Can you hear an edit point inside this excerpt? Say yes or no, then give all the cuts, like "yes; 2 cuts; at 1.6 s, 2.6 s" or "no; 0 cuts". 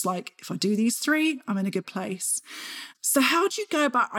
yes; 1 cut; at 2.9 s